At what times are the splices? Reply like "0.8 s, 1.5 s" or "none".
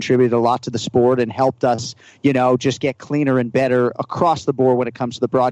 none